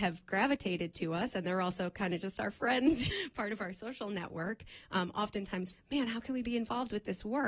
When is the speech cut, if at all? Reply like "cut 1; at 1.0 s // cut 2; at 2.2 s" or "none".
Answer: cut 1; at 3.1 s // cut 2; at 5.7 s